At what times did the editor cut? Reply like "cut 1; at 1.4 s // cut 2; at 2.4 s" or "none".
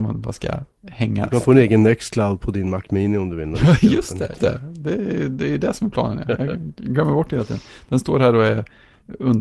cut 1; at 4.4 s